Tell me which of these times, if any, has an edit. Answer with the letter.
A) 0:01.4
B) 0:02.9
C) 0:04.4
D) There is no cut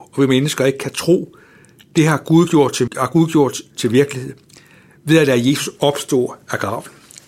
B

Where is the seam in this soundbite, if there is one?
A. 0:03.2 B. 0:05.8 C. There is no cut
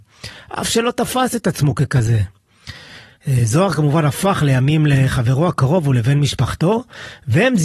A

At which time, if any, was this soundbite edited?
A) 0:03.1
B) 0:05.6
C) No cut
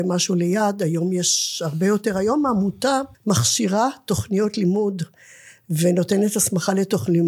A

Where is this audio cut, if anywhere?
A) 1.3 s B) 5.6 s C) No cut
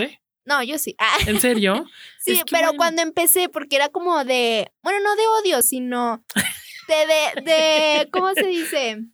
C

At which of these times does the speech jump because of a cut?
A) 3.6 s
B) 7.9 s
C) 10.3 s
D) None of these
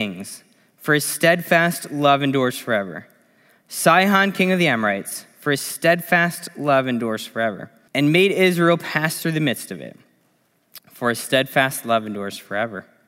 B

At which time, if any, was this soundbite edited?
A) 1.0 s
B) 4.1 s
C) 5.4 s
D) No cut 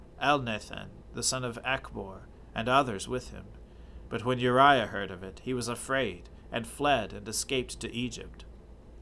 B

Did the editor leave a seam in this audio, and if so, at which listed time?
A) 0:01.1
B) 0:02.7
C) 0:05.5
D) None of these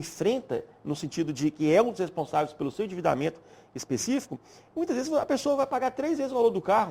D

